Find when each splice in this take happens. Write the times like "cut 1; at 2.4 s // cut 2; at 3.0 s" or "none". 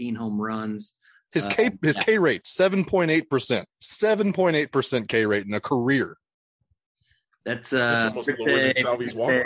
cut 1; at 3.7 s